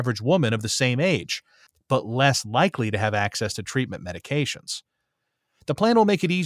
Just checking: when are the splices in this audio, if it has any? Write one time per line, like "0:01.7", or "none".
none